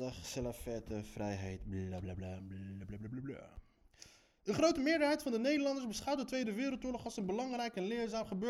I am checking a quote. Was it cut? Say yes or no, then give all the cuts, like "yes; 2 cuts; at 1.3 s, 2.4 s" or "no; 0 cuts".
no; 0 cuts